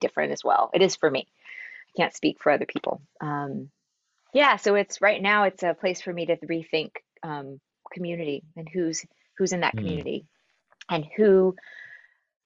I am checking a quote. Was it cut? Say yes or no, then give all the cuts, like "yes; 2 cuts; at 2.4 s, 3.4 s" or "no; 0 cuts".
no; 0 cuts